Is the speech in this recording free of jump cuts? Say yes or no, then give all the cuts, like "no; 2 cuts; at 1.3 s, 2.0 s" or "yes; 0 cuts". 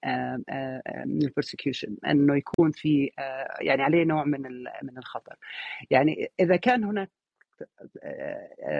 yes; 0 cuts